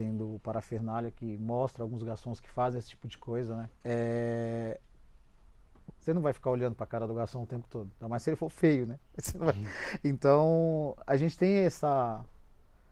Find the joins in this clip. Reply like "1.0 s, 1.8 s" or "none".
3.7 s, 5.9 s